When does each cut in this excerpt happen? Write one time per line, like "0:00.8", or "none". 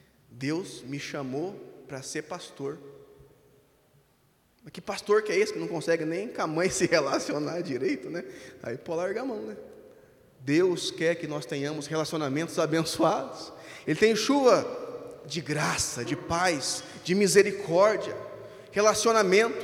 0:10.3
0:13.9
0:16.0